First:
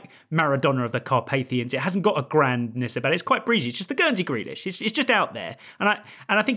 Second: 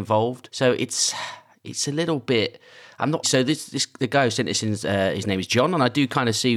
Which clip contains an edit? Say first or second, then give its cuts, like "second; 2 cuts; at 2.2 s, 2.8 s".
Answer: second; 1 cut; at 3.2 s